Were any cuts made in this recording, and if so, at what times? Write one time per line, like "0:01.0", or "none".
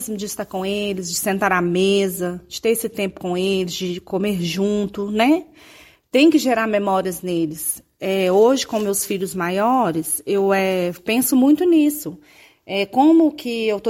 none